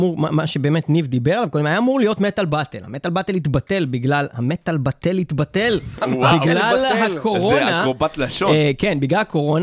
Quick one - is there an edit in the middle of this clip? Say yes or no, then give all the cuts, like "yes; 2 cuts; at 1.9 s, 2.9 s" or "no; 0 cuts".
no; 0 cuts